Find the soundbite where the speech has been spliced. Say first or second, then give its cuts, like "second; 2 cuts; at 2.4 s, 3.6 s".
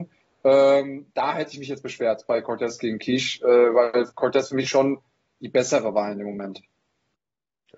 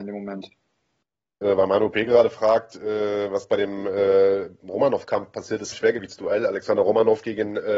second; 2 cuts; at 1.4 s, 5.7 s